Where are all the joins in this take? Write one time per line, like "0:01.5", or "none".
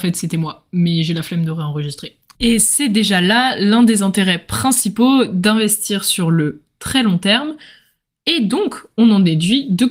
0:02.3